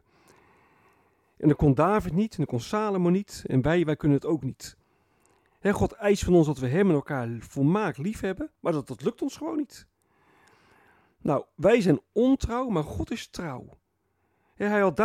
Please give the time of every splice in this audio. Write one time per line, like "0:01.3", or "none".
0:08.5